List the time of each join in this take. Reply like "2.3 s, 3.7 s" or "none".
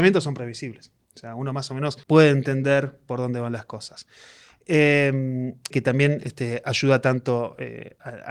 2.0 s, 5.7 s